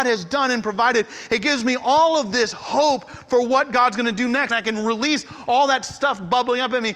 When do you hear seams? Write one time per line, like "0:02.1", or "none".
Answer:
0:04.5